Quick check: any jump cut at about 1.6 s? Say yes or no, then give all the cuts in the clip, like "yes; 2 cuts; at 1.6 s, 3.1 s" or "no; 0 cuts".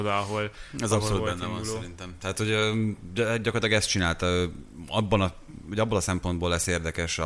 no; 0 cuts